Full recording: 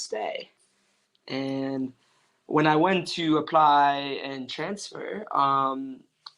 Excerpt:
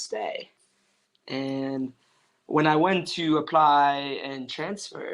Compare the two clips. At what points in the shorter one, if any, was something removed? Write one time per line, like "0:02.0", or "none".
none